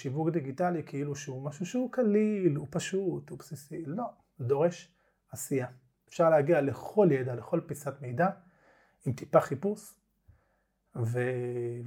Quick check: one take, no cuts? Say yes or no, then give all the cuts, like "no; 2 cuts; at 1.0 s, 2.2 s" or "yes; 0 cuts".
no; 1 cut; at 6.1 s